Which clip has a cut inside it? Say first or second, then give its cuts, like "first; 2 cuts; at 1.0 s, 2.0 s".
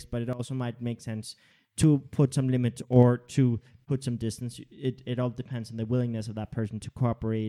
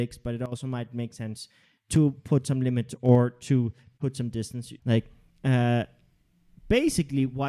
second; 1 cut; at 4.8 s